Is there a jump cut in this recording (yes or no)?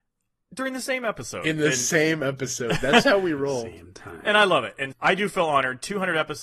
yes